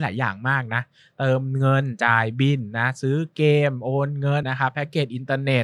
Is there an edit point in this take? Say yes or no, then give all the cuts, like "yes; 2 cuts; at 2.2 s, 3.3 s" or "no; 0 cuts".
yes; 1 cut; at 4.4 s